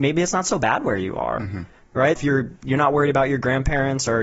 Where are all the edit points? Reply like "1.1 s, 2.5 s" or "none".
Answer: 2.1 s